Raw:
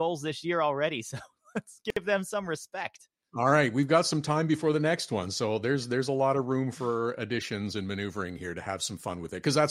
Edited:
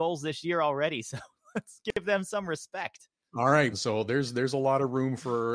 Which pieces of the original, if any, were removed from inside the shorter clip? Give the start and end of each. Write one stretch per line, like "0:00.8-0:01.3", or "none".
0:03.7-0:05.3